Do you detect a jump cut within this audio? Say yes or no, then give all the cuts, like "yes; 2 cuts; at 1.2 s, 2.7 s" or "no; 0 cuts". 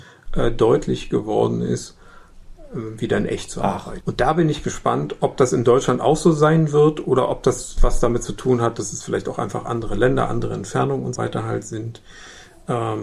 yes; 2 cuts; at 4.0 s, 11.2 s